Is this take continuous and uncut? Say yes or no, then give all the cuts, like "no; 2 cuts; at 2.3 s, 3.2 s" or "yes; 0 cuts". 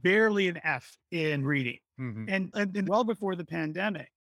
no; 1 cut; at 2.8 s